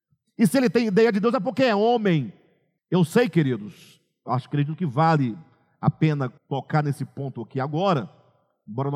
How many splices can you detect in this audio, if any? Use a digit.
2